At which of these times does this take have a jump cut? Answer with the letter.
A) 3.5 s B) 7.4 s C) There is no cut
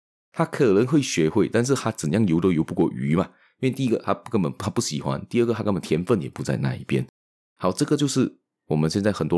C